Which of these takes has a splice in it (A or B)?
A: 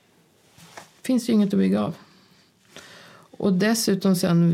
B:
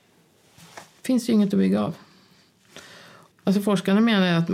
B